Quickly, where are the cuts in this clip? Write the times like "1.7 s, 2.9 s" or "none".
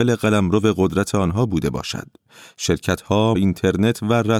3.4 s